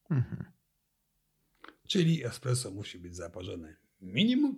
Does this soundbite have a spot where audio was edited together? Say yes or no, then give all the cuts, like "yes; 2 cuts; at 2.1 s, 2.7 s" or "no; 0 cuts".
no; 0 cuts